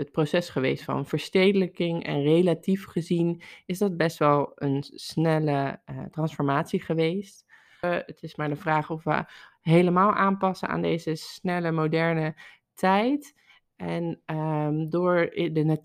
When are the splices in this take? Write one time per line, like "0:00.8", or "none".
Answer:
0:07.8